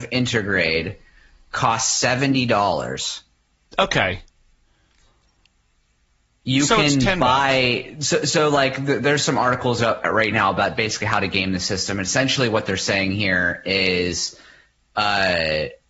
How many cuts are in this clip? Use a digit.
0